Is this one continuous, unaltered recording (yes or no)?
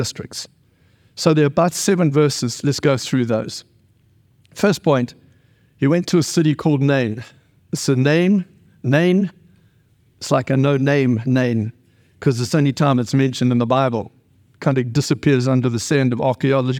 yes